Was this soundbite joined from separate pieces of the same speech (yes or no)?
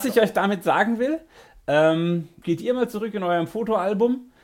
yes